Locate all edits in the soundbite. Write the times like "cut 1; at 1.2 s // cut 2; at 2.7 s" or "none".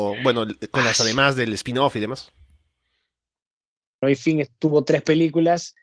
cut 1; at 4.0 s